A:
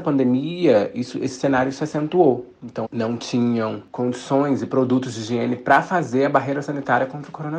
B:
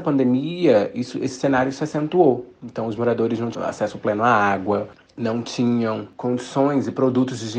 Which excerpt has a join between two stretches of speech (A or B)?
A